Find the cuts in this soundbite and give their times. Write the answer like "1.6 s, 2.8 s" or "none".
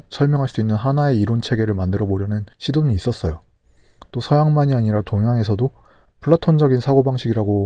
2.5 s